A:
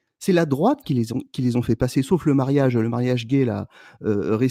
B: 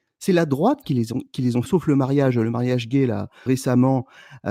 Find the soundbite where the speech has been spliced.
B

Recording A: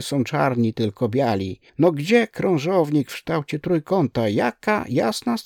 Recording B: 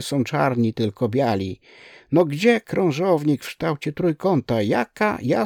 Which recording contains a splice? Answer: A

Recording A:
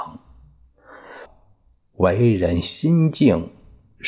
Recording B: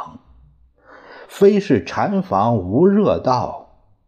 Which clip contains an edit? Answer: A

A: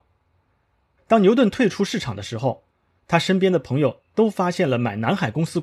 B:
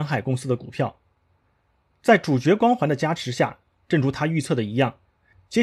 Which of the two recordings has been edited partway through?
A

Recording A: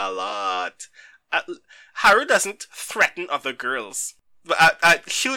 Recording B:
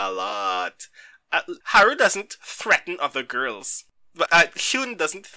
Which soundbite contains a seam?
B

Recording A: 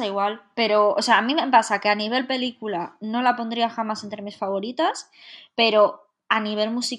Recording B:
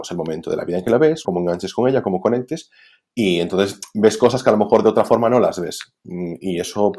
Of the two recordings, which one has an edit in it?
B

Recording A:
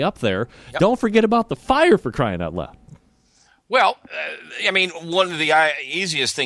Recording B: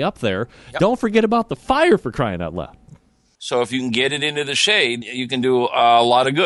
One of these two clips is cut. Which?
B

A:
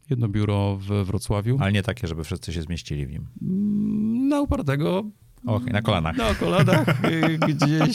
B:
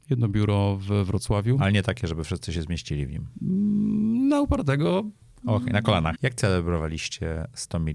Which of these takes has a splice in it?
B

